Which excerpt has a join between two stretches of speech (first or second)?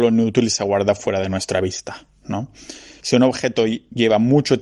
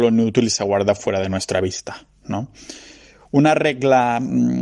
first